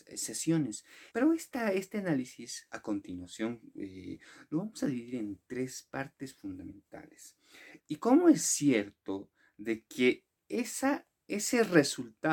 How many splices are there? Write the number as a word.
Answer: two